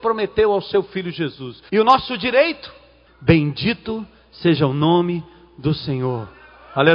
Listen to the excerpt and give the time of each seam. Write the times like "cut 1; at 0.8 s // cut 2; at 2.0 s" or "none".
cut 1; at 1.7 s // cut 2; at 3.1 s